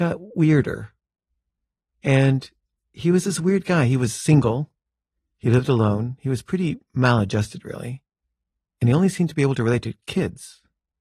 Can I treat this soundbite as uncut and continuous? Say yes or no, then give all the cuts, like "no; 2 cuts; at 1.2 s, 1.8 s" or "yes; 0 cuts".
yes; 0 cuts